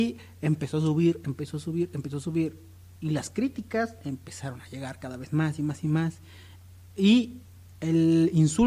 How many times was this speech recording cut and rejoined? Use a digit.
0